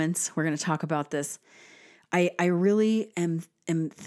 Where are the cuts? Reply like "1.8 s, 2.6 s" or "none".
none